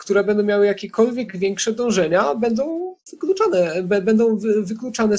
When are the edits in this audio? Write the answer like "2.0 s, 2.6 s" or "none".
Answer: none